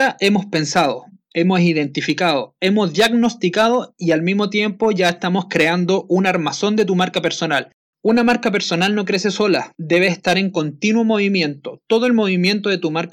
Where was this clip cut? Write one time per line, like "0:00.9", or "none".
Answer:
0:07.9